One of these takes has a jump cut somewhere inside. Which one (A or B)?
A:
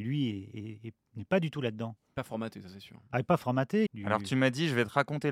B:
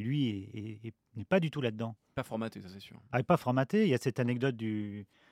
A